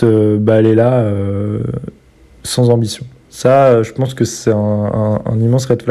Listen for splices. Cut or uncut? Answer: uncut